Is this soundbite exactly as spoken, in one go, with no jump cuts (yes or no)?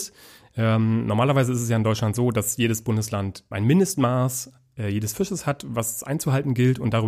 yes